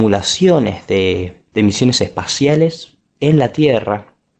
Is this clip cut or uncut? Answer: uncut